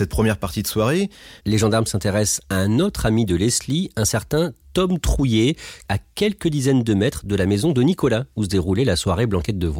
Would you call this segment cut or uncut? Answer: cut